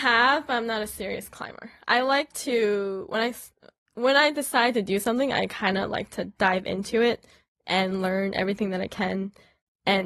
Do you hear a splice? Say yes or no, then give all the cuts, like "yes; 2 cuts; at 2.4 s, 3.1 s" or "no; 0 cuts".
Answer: no; 0 cuts